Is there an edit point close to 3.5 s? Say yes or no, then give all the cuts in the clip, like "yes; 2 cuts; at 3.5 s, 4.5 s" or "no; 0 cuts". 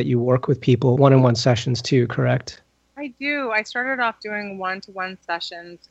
no; 1 cut; at 0.9 s